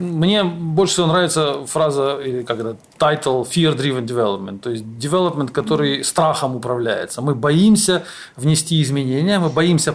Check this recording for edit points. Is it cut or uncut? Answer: uncut